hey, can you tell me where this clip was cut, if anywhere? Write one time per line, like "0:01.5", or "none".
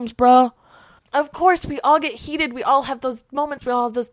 0:01.0